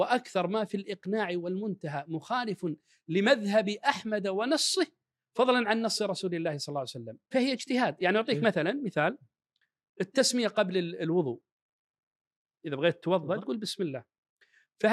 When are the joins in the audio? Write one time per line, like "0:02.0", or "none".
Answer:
0:07.3